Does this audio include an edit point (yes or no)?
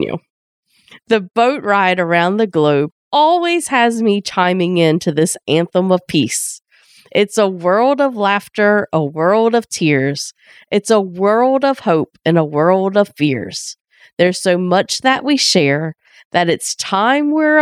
yes